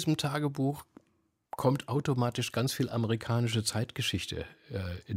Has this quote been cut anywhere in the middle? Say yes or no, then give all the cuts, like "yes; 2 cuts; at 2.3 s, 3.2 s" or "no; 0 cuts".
no; 0 cuts